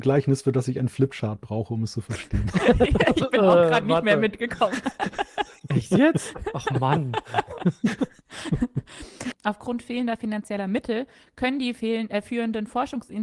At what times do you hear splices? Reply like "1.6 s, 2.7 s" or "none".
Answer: 9.3 s